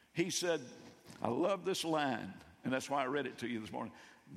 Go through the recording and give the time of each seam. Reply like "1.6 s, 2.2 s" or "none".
none